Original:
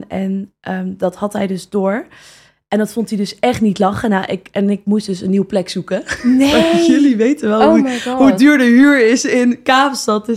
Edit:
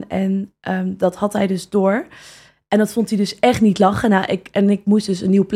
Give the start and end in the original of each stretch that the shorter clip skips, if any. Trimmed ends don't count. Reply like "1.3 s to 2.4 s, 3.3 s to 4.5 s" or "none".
none